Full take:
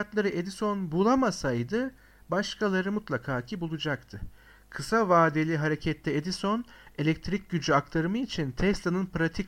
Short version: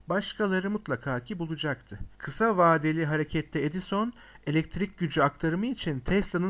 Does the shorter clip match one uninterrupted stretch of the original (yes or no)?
no